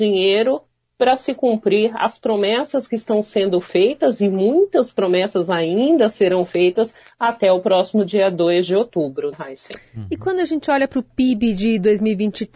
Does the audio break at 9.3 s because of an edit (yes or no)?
yes